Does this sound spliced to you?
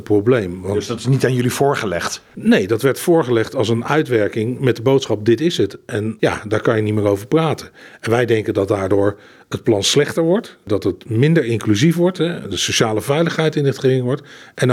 no; 0 cuts

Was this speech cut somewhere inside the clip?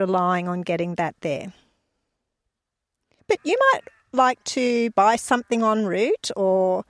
yes; 1 cut; at 3.2 s

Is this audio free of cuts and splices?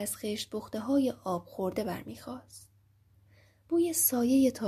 yes; 0 cuts

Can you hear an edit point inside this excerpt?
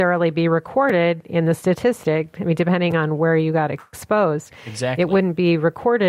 no; 0 cuts

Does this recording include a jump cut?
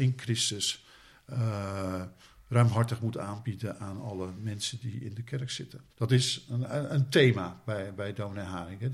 yes; 1 cut; at 5.9 s

